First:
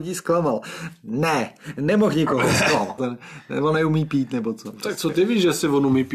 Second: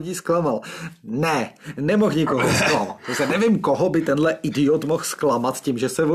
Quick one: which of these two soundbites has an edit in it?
first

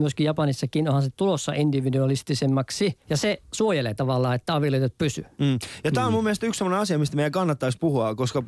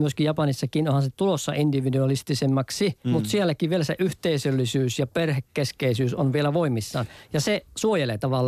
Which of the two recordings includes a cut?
first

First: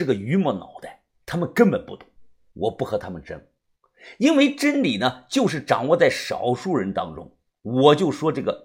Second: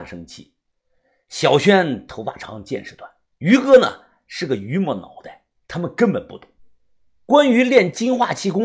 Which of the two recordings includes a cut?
first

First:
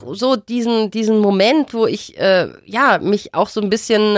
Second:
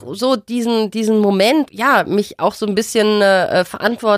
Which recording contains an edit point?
second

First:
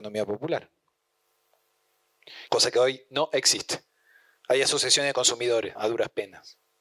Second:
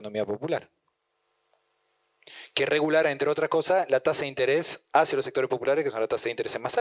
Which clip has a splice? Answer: first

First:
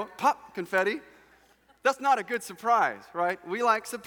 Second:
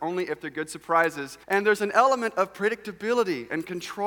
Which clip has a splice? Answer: second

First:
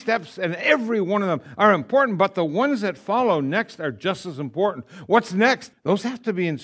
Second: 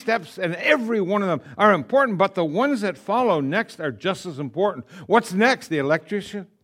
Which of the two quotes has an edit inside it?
first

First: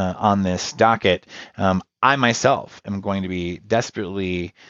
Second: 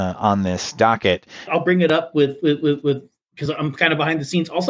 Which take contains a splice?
second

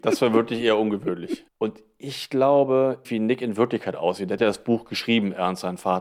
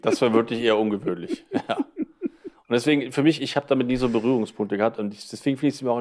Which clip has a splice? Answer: first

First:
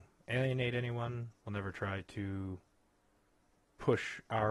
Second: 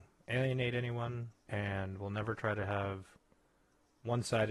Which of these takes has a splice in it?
second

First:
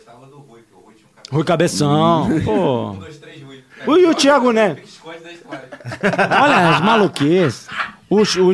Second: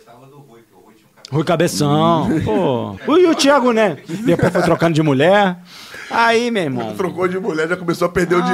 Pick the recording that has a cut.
second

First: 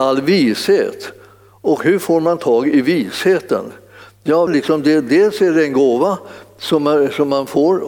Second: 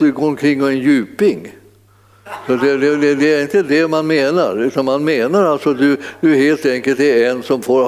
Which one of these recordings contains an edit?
first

